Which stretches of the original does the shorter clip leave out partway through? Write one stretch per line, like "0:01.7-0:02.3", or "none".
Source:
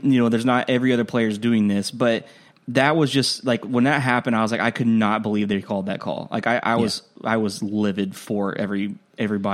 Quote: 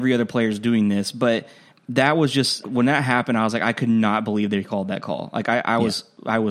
0:03.4-0:03.6